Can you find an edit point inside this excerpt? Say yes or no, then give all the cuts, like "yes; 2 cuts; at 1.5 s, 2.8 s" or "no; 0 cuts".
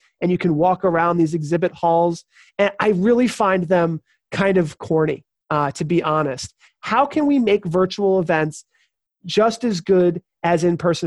yes; 1 cut; at 6.7 s